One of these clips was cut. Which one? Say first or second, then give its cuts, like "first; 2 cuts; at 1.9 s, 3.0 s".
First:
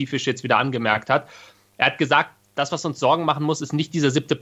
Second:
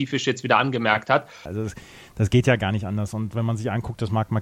second; 1 cut; at 1.5 s